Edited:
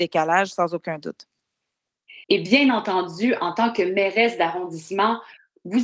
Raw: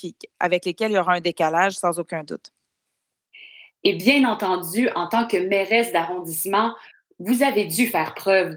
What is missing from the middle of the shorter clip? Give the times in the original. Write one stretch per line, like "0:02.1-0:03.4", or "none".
0:03.5-0:03.8

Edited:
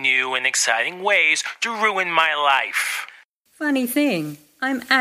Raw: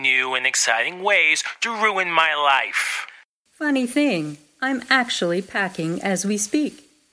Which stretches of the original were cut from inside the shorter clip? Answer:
none

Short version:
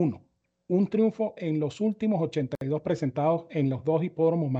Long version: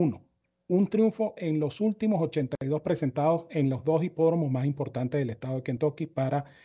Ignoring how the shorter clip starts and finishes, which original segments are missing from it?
none

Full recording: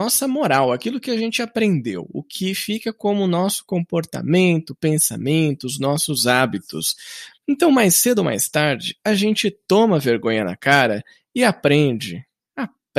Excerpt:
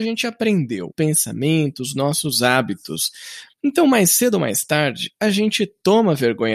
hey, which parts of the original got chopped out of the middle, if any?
0:02.1-0:04.8

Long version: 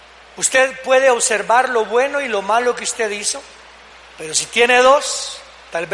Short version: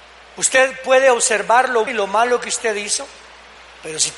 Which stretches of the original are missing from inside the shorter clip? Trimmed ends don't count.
0:01.9-0:02.2

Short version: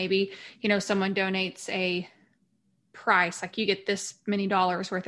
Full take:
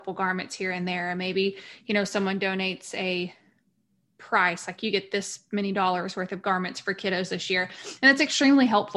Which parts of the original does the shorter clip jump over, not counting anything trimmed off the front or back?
none

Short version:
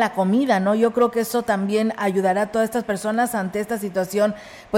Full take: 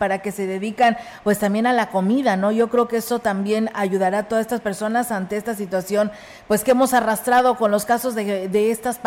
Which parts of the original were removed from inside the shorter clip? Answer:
none

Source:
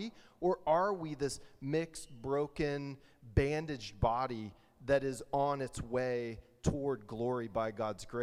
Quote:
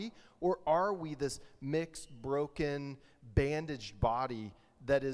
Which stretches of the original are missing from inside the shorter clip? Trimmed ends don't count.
none

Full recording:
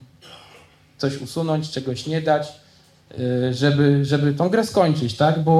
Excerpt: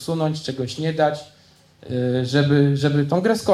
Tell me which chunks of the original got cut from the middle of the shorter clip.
none

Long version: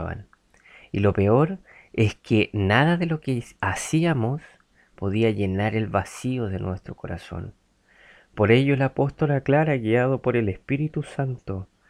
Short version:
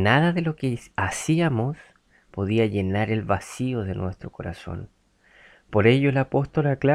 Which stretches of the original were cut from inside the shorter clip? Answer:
none

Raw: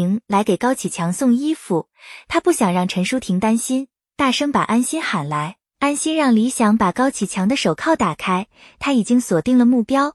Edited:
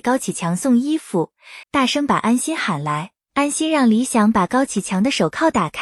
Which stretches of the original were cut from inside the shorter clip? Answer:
0:02.2-0:04.1

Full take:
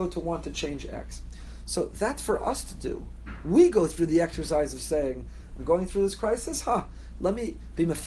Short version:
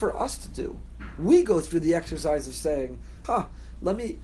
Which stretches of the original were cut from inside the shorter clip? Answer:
0:05.5-0:06.6

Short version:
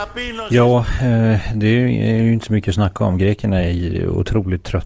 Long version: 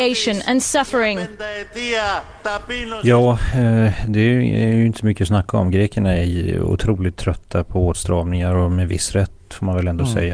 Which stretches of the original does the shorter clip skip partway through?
none

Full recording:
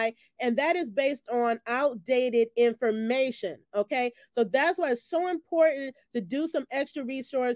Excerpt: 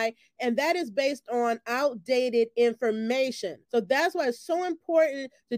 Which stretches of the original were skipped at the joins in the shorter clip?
0:03.7-0:04.3

